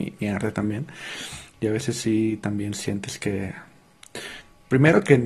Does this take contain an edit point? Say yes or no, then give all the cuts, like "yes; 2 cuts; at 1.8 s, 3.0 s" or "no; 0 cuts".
no; 0 cuts